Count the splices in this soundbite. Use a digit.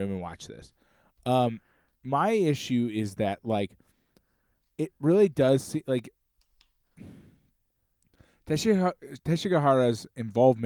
0